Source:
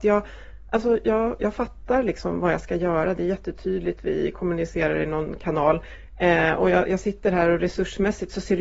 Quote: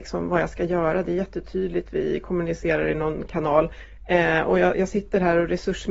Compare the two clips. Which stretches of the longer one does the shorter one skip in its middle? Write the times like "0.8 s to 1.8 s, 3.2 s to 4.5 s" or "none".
none